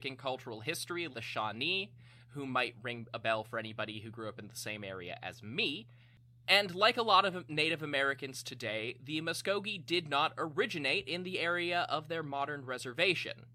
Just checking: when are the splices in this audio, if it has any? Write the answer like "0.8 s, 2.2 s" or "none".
1.1 s